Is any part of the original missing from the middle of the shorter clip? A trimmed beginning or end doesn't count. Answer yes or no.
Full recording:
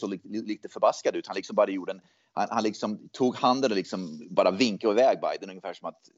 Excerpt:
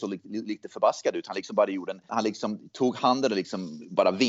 yes